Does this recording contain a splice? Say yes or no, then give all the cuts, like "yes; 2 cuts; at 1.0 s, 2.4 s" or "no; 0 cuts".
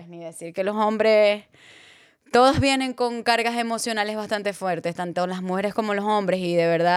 no; 0 cuts